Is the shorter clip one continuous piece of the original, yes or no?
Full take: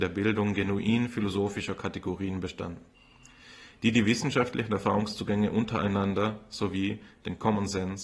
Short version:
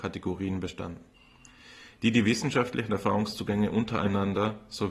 yes